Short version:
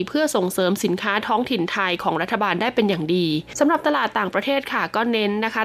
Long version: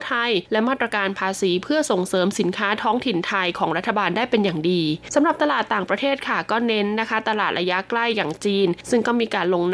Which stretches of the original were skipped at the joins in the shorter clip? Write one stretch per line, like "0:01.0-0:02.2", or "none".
none